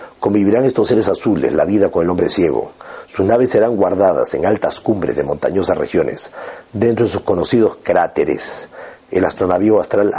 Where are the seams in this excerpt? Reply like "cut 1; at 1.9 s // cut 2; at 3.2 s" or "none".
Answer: none